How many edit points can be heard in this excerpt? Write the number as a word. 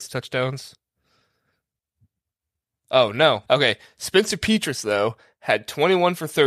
one